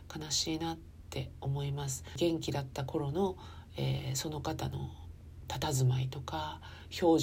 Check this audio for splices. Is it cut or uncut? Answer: uncut